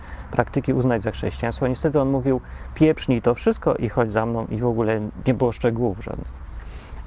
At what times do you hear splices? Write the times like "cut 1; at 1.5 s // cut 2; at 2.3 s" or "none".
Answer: cut 1; at 5.2 s

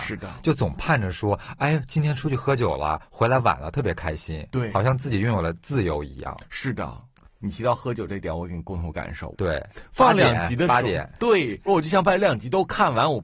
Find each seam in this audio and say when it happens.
cut 1; at 9.3 s // cut 2; at 11.7 s

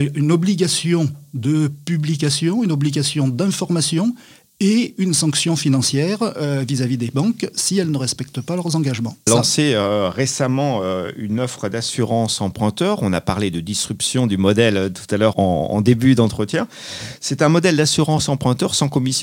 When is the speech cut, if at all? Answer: cut 1; at 9.3 s // cut 2; at 15.3 s

